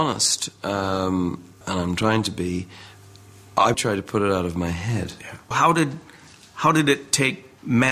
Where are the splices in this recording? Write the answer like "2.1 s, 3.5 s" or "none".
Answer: 1.6 s, 3.7 s, 5.5 s